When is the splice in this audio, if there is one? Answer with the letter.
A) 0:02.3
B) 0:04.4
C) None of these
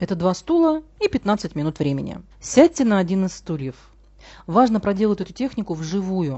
A